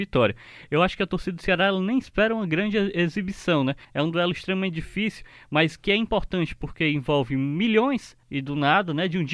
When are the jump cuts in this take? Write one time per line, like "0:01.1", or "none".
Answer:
0:03.8
0:08.2